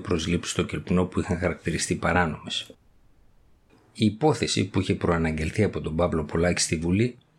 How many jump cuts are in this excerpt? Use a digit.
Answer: 0